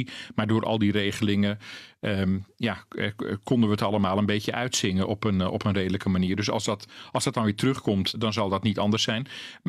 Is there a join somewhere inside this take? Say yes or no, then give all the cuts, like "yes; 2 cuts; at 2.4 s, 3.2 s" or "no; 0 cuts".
yes; 1 cut; at 8.1 s